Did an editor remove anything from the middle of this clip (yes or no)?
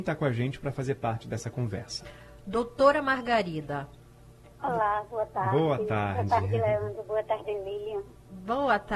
yes